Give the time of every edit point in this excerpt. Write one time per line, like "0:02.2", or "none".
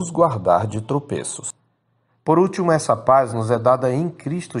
none